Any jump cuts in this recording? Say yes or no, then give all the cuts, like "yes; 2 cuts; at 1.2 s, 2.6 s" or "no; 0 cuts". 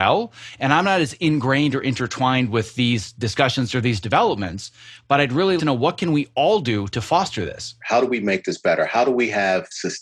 yes; 2 cuts; at 5.6 s, 7.8 s